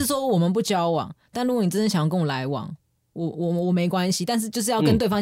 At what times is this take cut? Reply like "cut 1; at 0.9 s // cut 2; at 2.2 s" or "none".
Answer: none